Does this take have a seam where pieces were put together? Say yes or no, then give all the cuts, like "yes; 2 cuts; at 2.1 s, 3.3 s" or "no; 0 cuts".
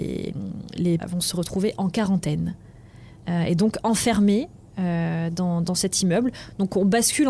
yes; 1 cut; at 1.0 s